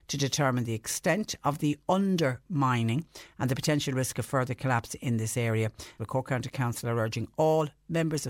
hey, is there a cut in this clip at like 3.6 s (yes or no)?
no